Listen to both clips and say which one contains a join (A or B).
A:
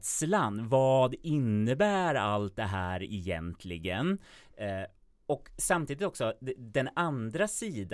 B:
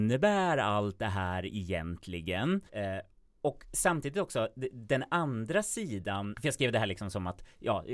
B